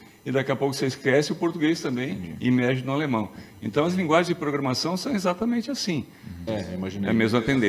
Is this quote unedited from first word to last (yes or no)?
no